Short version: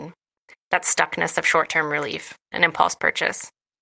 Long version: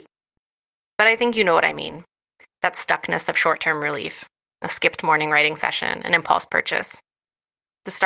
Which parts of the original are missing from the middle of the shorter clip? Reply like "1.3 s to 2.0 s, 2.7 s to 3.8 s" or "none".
4.4 s to 6.0 s